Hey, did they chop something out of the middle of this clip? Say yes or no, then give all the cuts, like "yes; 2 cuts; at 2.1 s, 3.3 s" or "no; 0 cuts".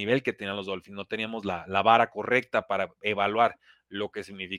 no; 0 cuts